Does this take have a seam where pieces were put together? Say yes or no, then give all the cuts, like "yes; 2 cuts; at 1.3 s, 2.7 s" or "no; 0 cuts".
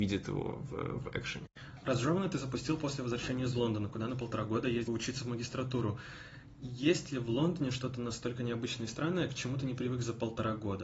no; 0 cuts